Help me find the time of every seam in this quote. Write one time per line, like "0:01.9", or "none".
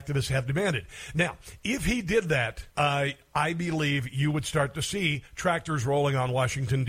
0:02.7